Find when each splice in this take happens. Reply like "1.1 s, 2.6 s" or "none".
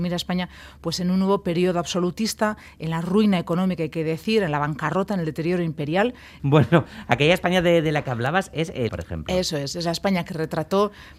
6.4 s, 8.9 s